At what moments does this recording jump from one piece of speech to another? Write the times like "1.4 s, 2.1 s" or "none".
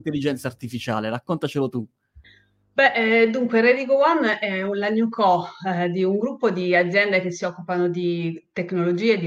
none